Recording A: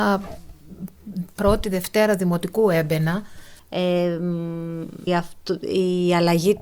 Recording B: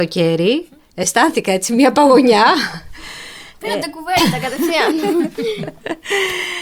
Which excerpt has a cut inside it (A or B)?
A